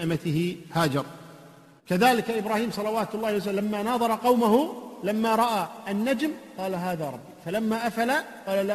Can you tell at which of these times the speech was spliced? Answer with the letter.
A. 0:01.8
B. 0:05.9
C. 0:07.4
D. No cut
A